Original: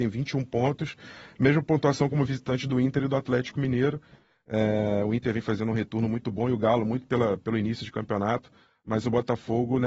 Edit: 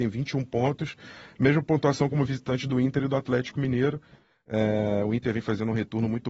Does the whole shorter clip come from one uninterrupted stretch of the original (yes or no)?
yes